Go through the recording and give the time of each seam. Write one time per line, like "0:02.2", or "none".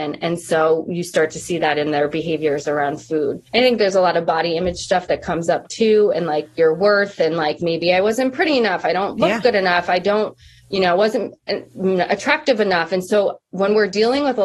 0:03.5